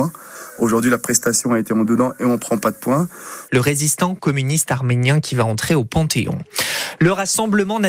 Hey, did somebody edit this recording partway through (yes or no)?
yes